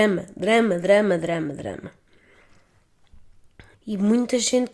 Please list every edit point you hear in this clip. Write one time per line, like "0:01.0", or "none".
0:03.7